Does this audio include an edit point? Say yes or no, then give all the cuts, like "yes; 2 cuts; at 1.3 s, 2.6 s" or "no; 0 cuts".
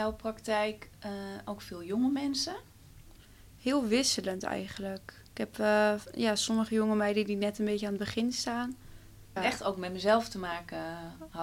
yes; 2 cuts; at 5.3 s, 9.4 s